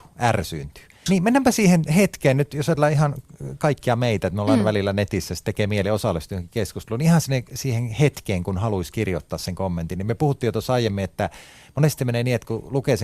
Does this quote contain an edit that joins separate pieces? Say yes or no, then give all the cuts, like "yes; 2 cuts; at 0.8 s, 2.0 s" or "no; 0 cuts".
yes; 1 cut; at 1.1 s